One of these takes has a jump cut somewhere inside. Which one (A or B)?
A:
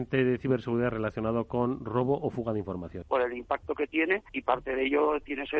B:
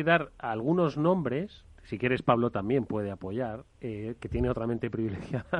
A